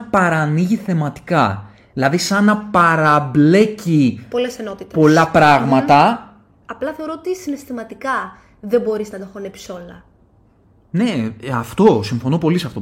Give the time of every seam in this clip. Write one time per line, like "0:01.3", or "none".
0:06.6